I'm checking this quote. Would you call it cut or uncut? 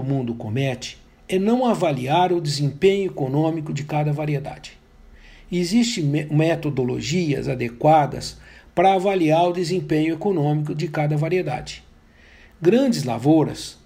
uncut